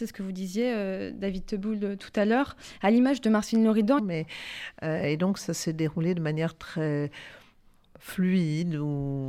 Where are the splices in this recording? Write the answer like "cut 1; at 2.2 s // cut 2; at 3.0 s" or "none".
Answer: cut 1; at 4.0 s

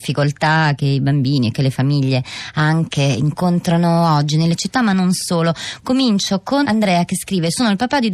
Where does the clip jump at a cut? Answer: cut 1; at 6.6 s

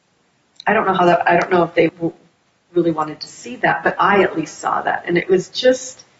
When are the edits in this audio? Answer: cut 1; at 1.9 s

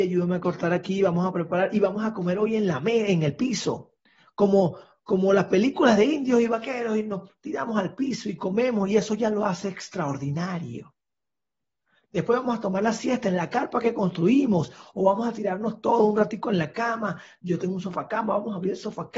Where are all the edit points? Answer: none

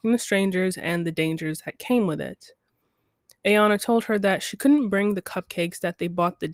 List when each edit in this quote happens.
cut 1; at 3.4 s

